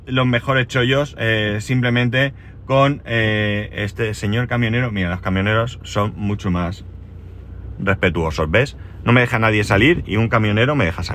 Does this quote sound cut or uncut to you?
uncut